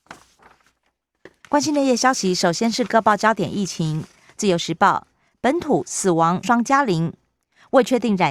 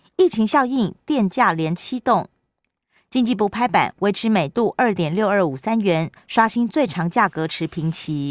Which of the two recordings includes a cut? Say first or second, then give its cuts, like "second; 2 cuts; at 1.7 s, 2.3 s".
first; 2 cuts; at 1.4 s, 6.4 s